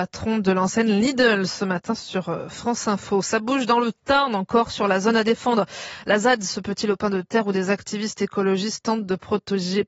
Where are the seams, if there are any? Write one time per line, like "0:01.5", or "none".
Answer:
none